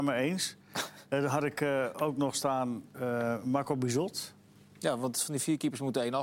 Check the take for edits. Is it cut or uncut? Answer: uncut